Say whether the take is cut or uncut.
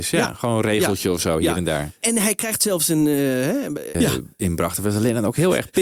cut